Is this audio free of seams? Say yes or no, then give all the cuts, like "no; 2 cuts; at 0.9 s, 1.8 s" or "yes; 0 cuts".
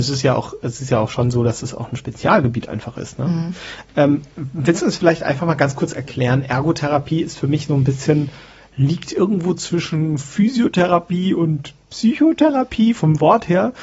yes; 0 cuts